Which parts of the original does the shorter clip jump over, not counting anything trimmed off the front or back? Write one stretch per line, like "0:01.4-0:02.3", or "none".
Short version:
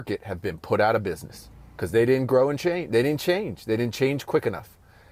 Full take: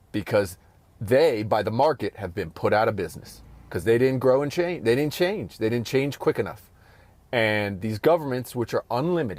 none

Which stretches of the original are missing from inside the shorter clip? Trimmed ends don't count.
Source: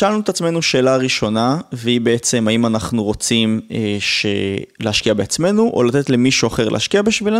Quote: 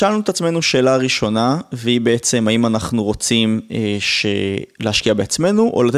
none

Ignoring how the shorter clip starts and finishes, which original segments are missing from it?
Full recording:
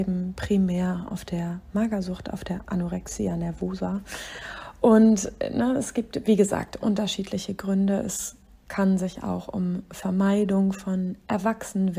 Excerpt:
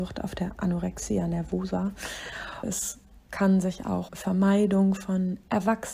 0:04.7-0:08.0
0:09.5-0:09.9

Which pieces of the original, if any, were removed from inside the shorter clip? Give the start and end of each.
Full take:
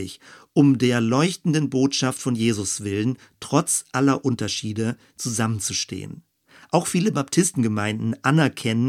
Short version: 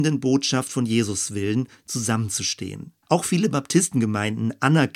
0:03.2-0:05.1
0:06.3-0:06.6

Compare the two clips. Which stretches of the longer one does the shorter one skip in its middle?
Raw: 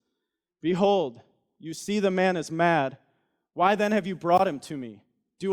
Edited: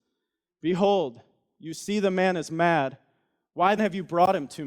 0:03.8-0:03.9

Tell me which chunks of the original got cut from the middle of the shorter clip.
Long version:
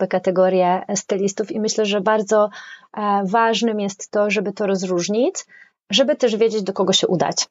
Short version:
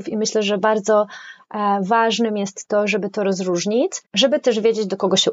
0:05.5-0:05.8

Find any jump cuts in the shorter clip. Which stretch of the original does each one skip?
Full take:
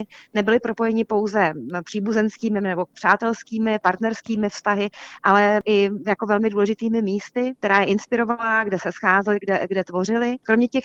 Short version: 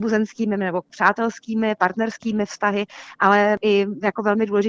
none

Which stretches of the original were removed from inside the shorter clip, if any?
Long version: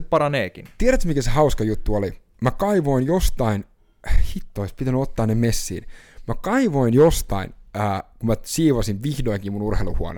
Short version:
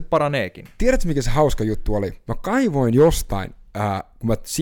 0:02.3-0:06.3

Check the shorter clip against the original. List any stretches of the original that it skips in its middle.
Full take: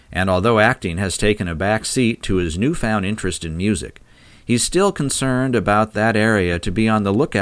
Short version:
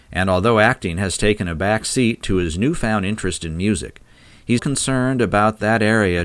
0:04.6-0:04.9

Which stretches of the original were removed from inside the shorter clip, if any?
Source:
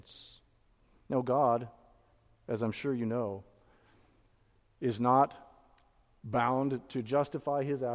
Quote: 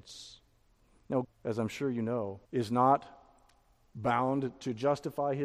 0:01.2-0:02.3
0:03.5-0:04.7

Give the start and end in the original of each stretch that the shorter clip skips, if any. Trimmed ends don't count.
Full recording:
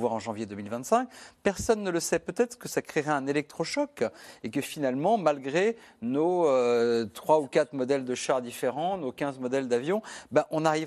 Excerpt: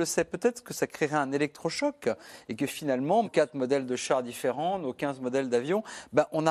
0:05.2-0:07.4

